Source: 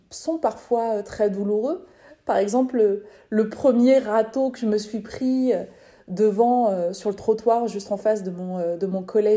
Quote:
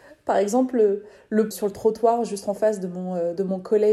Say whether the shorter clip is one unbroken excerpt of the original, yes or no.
no